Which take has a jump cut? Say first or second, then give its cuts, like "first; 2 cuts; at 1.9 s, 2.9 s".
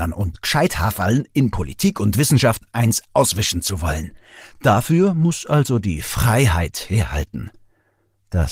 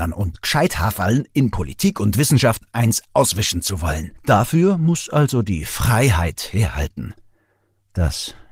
second; 1 cut; at 4.2 s